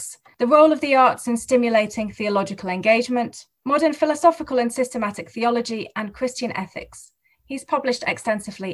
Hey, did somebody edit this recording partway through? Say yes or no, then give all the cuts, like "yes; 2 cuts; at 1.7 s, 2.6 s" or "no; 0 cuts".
no; 0 cuts